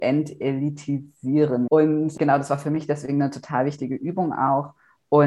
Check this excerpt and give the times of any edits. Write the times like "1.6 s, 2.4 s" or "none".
1.7 s

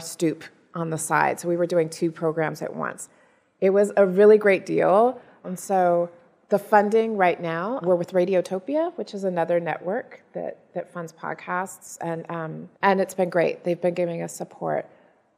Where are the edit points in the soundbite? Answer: 5.4 s, 7.8 s, 12.7 s

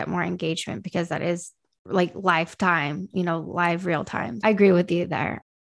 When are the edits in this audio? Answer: 4.4 s

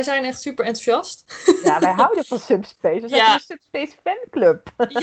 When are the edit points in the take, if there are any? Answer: none

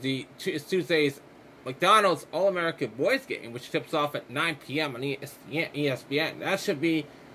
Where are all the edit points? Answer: none

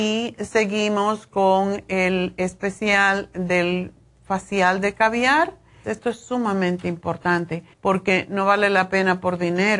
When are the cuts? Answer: 5.8 s, 7.7 s

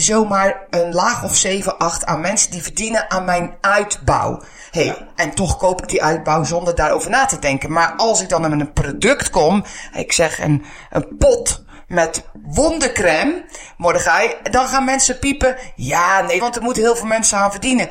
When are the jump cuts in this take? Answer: 16.4 s

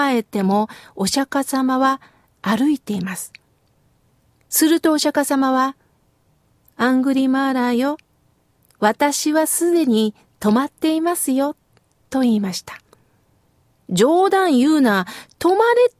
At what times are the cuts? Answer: none

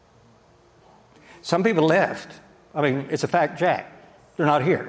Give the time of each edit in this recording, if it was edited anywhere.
none

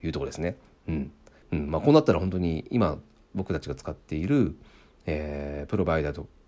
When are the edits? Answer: 1.4 s

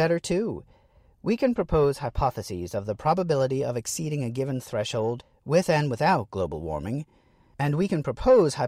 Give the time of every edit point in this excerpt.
none

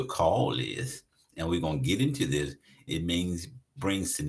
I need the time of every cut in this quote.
1.3 s, 2.9 s

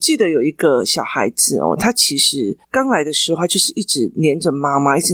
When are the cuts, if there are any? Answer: 2.6 s

